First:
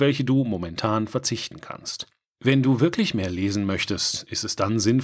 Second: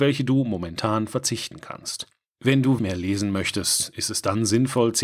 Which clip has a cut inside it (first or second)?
second